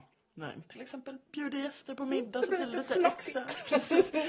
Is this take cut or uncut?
uncut